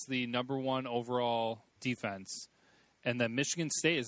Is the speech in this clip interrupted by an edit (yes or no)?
yes